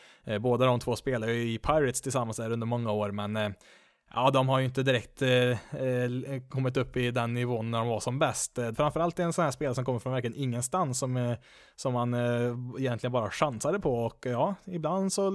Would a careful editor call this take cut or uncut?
cut